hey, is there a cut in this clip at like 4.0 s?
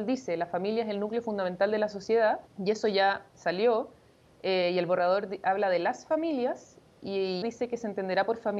no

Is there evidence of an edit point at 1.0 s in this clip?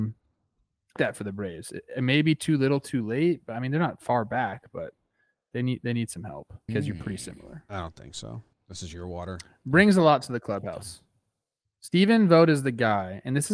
yes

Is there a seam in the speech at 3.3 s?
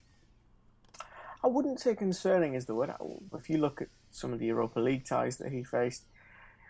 yes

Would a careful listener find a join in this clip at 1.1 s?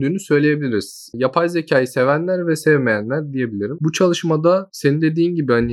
no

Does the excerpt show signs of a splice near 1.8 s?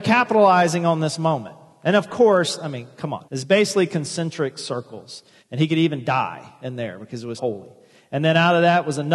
no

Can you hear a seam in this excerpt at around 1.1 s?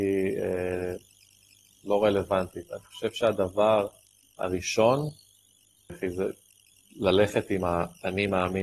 no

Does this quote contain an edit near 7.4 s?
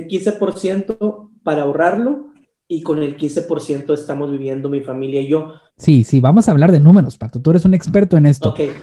no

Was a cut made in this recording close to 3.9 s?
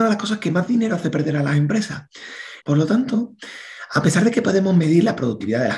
no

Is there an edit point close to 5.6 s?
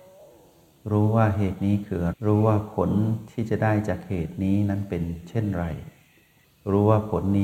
no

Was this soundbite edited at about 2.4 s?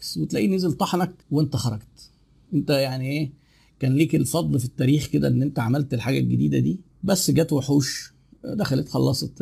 no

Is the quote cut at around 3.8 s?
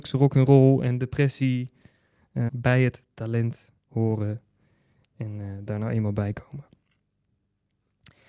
yes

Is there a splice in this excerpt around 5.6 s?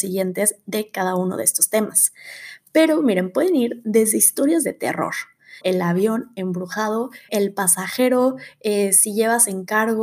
yes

